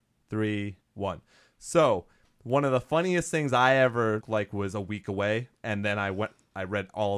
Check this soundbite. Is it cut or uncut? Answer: cut